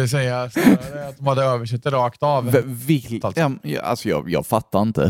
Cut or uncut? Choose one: cut